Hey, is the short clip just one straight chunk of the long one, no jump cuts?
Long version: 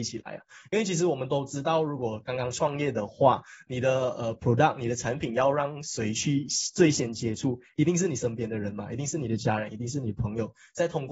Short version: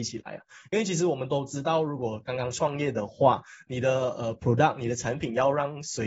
yes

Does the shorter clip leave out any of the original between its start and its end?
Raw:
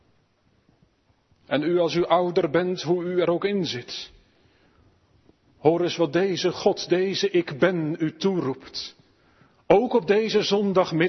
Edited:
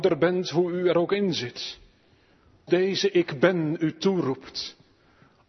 yes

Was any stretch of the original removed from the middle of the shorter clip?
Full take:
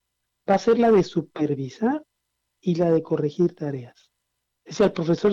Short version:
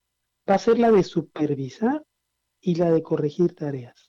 no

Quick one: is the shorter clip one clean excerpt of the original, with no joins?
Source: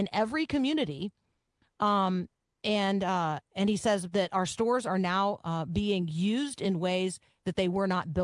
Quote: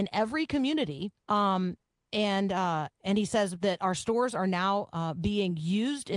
no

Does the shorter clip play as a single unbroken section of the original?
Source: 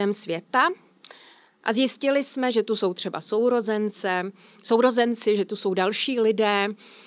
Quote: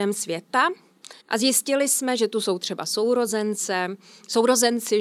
no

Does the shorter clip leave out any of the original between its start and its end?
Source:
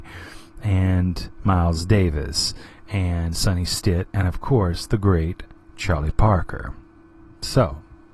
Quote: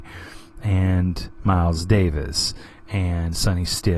no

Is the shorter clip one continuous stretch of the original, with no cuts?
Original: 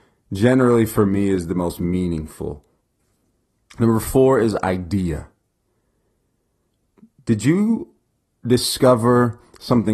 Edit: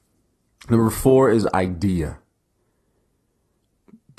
yes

